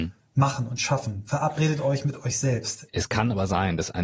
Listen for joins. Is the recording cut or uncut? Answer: cut